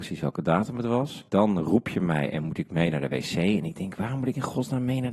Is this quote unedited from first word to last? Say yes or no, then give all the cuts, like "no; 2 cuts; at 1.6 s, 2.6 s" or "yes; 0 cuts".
no; 1 cut; at 1.3 s